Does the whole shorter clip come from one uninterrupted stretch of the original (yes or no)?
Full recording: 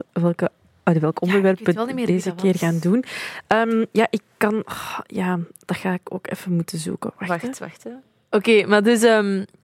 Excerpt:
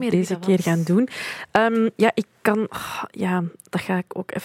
yes